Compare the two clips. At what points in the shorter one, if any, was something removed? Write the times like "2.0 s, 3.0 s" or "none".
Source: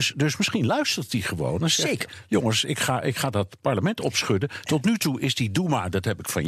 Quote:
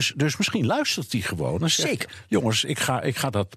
none